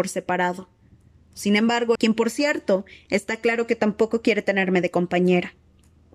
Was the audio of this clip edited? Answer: yes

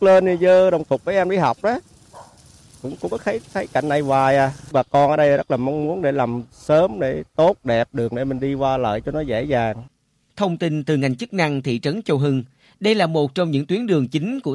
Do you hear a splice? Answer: no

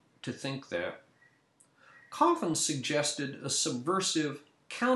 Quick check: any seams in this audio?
no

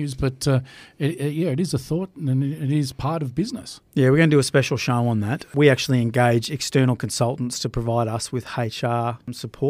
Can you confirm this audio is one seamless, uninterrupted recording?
yes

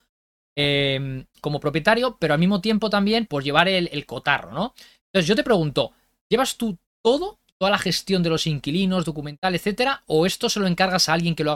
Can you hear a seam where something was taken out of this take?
yes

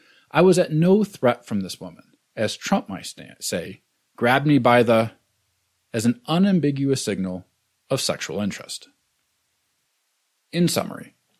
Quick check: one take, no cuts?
no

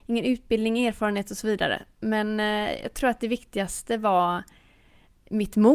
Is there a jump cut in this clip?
no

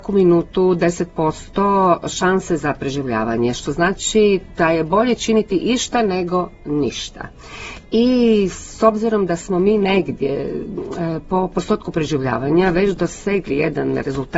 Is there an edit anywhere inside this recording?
no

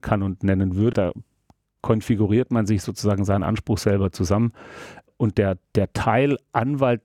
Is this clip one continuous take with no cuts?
no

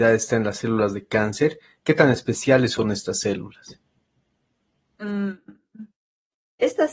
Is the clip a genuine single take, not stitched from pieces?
yes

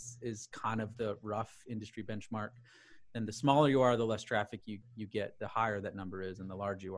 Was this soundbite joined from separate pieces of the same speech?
no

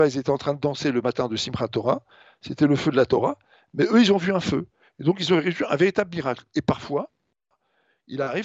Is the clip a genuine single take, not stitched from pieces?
yes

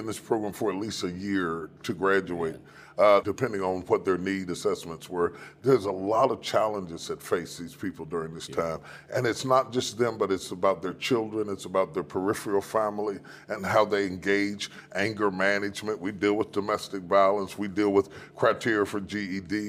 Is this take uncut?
no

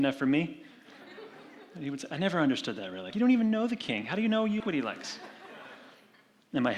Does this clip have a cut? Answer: yes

